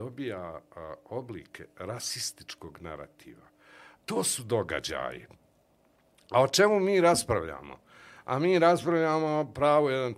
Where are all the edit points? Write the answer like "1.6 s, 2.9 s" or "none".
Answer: 3.9 s